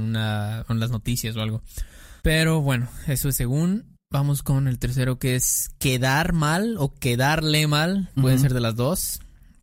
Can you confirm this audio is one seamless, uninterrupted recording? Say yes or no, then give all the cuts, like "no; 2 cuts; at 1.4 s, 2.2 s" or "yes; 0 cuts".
no; 1 cut; at 2.2 s